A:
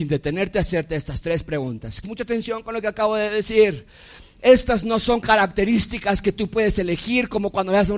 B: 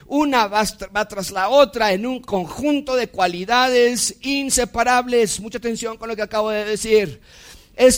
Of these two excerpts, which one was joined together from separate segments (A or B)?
A